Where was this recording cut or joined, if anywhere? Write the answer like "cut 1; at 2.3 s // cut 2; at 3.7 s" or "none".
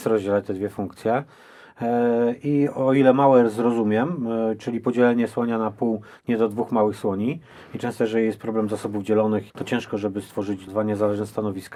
cut 1; at 9.5 s // cut 2; at 10.7 s